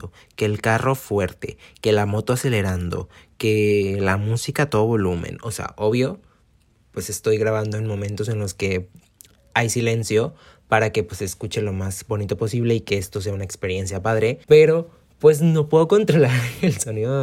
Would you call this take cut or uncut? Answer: cut